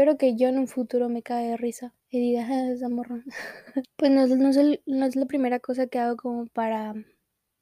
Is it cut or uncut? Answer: cut